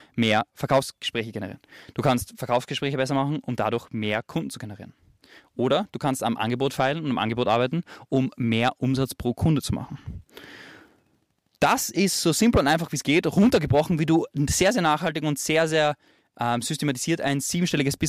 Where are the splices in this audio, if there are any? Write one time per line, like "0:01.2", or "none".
none